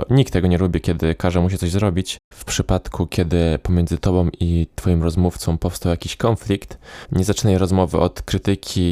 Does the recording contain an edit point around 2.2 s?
yes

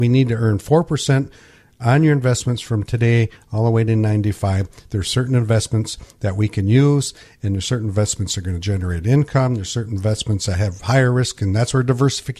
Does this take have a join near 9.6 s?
no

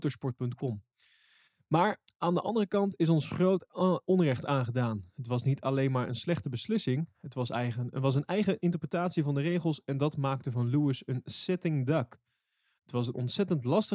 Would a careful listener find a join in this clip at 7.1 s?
no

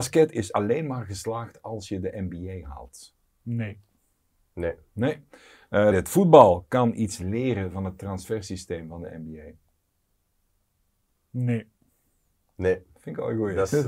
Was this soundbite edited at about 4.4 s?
no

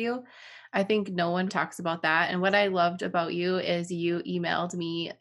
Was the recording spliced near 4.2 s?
no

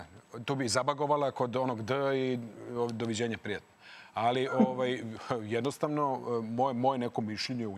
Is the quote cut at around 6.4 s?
no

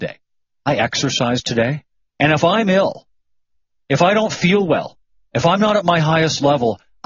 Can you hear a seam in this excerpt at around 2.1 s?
yes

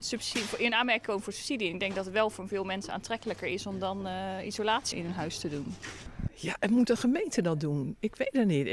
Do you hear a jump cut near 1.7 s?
no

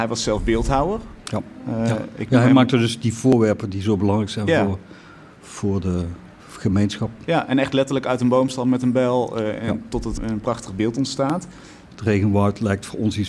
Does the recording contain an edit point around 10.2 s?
yes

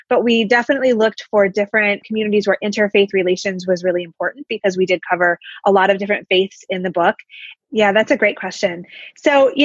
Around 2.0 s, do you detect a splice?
no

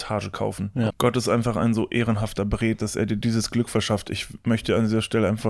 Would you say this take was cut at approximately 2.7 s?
yes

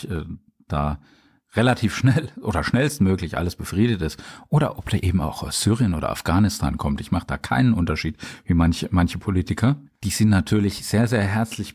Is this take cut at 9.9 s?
yes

